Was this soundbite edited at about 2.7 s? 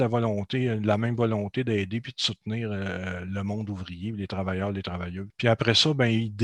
no; 1 cut; at 5.3 s

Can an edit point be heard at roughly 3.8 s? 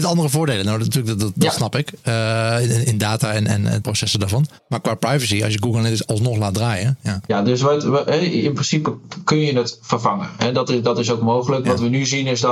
yes; 1 cut; at 3.8 s

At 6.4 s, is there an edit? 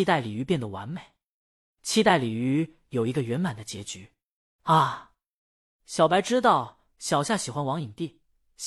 no; 1 cut; at 4.6 s

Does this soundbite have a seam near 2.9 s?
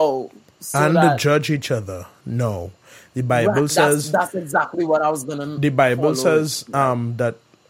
no; 0 cuts

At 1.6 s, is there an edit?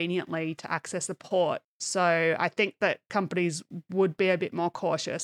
yes; 1 cut; at 1.6 s

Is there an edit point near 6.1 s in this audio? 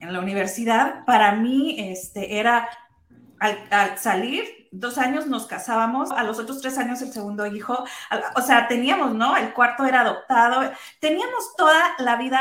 yes; 1 cut; at 6.1 s

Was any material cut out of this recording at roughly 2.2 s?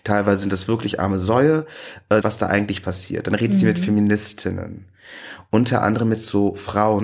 yes; 1 cut; at 2.2 s

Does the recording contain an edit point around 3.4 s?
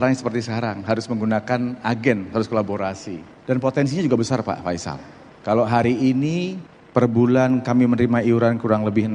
yes; 1 cut; at 3.4 s

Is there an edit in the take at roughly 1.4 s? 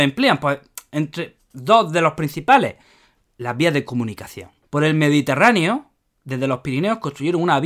yes; 2 cuts; at 1.4 s, 4.6 s

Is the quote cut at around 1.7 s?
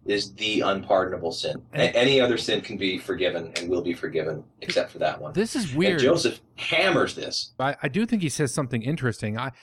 no; 1 cut; at 7.6 s

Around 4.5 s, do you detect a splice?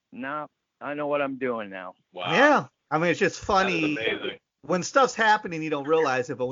no; 1 cut; at 2.0 s

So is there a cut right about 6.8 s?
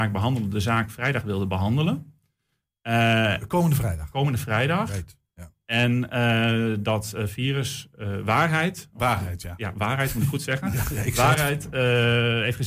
no; 0 cuts

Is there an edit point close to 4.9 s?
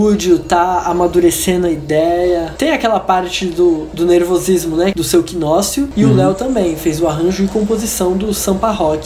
yes; 1 cut; at 4.9 s

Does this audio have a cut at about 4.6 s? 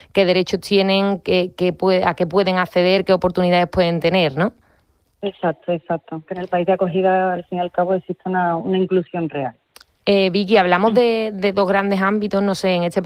no; 0 cuts

